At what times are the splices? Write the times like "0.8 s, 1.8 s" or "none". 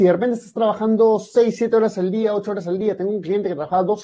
none